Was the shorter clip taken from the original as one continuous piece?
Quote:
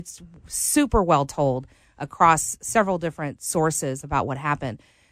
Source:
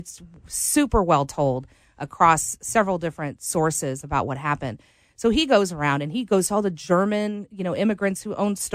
yes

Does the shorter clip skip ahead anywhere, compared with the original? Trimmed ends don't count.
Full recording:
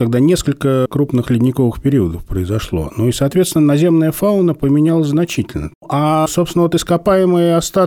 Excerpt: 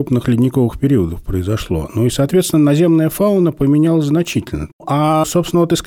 no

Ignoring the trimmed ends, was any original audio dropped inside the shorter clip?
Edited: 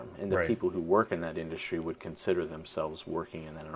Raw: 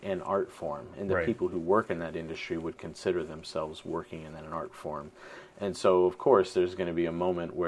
no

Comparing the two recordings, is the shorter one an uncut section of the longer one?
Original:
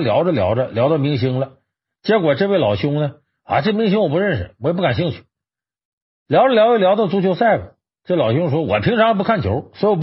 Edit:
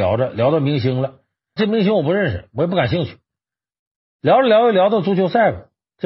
no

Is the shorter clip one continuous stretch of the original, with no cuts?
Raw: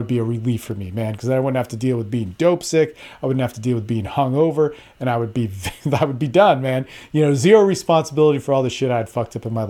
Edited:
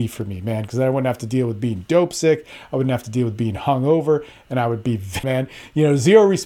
no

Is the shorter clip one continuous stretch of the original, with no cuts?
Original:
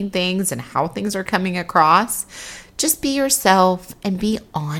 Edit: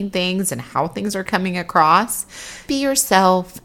no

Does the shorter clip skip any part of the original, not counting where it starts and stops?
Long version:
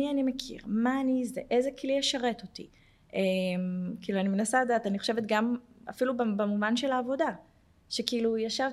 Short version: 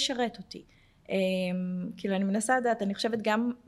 no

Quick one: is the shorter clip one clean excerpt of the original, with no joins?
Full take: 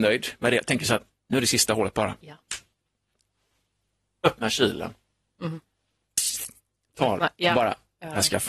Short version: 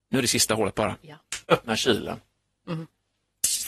no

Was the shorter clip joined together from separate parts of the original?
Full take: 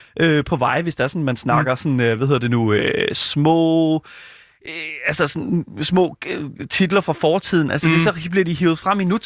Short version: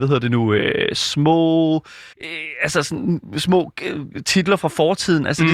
yes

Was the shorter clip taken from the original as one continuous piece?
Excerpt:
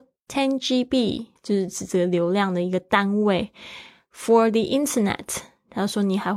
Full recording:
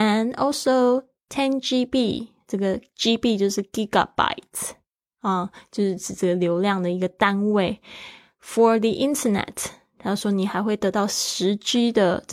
no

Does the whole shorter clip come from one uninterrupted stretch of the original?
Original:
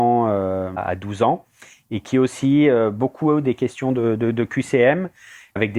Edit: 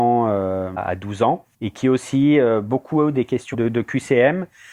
no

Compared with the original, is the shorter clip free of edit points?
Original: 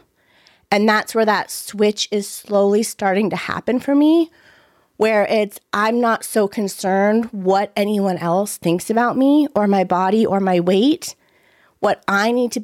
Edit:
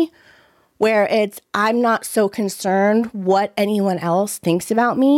yes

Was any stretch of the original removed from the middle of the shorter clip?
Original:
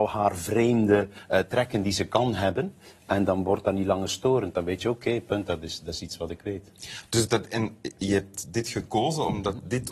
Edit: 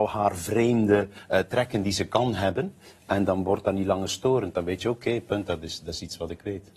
no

